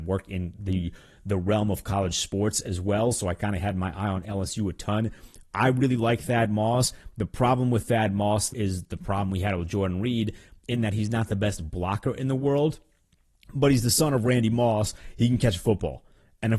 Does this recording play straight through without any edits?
no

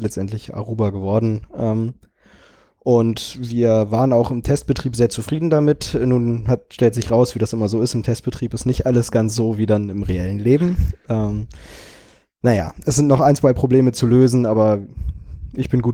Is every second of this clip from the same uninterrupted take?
yes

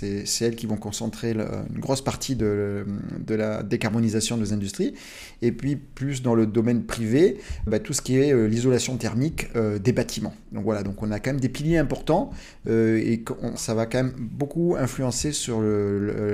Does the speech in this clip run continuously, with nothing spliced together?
no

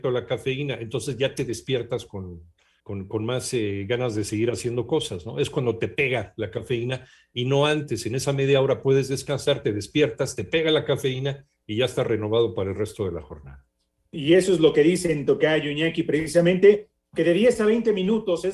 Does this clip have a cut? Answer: no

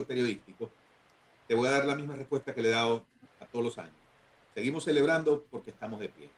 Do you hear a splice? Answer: no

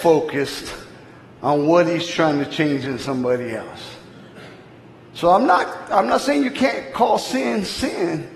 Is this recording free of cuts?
yes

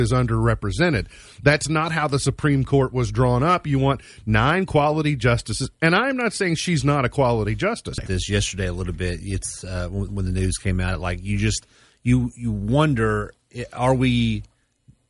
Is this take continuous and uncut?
no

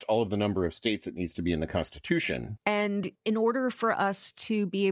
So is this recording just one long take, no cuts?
no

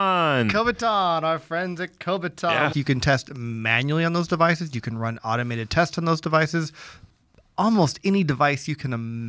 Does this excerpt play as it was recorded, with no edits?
no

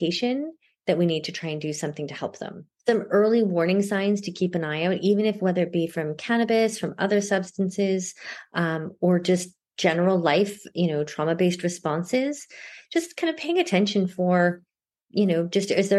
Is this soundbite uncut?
yes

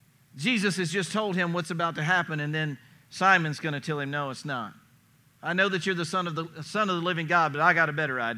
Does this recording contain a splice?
no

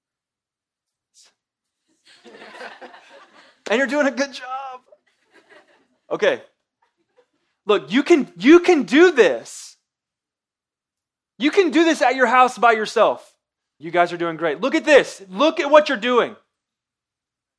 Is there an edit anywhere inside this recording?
yes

